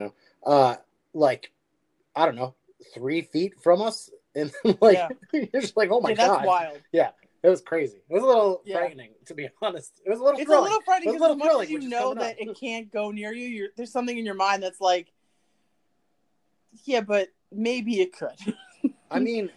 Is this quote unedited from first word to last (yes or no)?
yes